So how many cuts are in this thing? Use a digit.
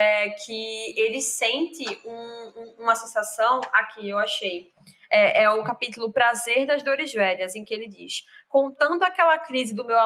0